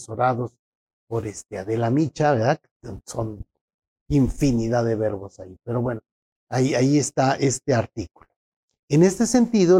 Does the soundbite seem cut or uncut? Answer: uncut